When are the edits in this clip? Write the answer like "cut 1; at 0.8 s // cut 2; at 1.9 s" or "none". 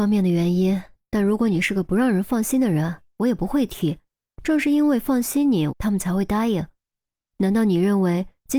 cut 1; at 4.3 s // cut 2; at 5.7 s